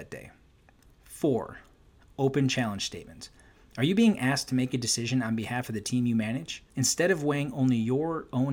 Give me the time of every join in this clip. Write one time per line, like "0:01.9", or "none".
0:06.7